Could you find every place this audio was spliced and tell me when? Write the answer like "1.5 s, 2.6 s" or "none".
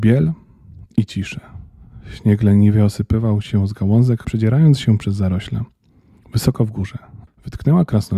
4.2 s, 7.3 s